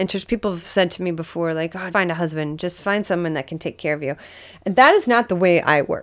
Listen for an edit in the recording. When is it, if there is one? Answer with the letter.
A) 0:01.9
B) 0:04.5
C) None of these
A